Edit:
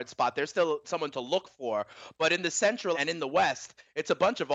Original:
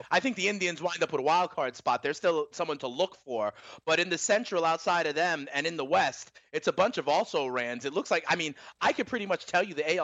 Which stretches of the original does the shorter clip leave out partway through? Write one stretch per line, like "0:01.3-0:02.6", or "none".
0:04.6-0:05.5